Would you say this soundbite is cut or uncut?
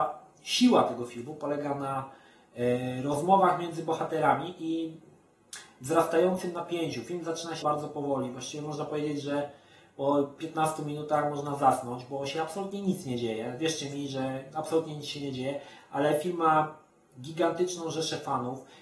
cut